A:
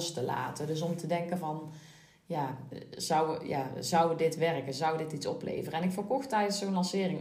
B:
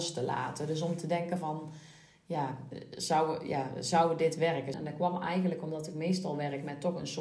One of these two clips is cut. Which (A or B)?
B